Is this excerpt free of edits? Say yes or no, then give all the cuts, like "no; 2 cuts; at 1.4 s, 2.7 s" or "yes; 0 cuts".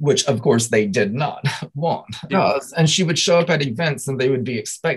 no; 1 cut; at 2.3 s